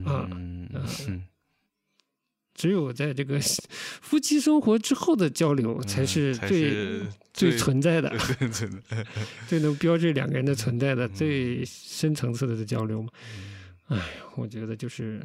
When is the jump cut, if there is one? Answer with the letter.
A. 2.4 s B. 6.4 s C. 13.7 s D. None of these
D